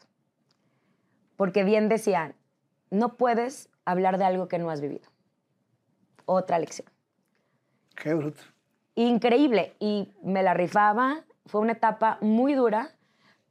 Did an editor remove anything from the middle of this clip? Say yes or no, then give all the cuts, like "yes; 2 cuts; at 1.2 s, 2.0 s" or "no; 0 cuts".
no; 0 cuts